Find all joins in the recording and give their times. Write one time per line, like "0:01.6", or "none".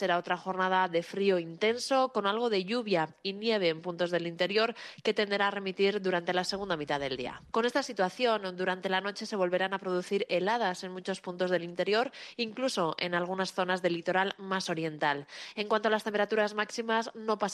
0:07.5